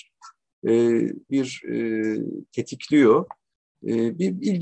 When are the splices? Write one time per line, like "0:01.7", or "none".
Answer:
0:01.3